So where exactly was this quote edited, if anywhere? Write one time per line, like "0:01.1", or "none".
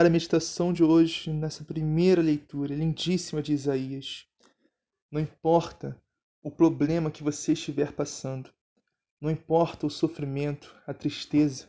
0:04.9